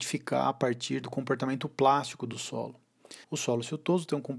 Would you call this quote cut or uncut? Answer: cut